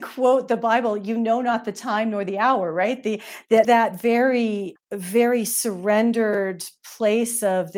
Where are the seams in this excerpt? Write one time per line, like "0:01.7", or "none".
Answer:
0:03.6
0:04.8